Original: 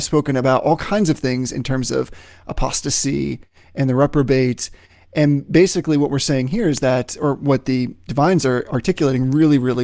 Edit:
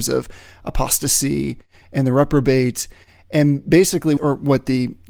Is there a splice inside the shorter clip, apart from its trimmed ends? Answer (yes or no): yes